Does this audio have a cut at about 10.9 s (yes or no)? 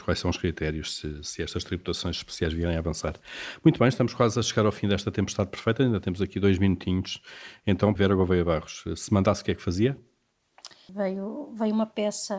yes